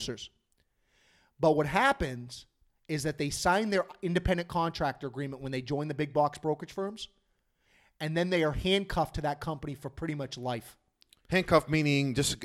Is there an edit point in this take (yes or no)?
no